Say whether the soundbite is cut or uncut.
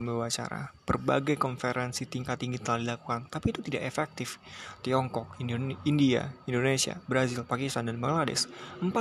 uncut